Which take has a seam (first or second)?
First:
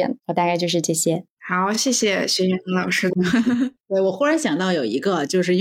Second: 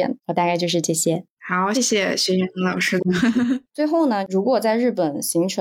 second